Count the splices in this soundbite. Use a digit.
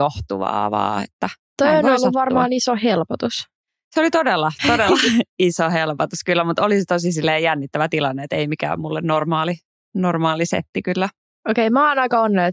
0